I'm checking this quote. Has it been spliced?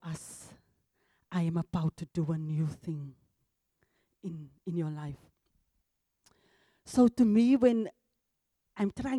no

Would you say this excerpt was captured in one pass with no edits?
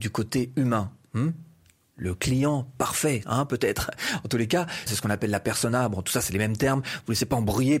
no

